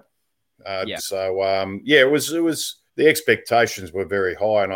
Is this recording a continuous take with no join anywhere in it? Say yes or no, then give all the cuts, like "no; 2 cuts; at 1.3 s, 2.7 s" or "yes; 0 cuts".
no; 2 cuts; at 1.0 s, 2.9 s